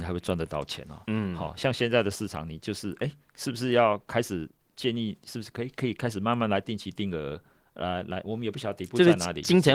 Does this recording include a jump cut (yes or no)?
no